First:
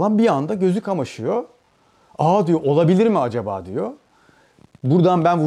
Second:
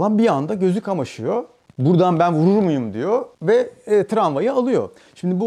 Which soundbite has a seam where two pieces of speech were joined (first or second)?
second